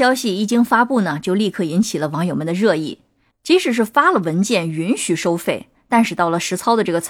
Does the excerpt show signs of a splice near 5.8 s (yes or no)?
no